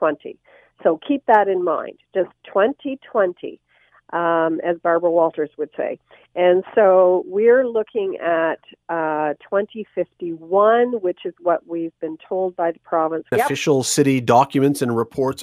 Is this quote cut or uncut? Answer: cut